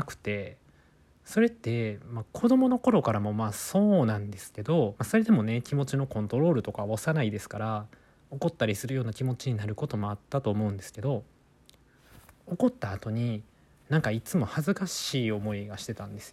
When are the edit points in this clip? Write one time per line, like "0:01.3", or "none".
0:05.0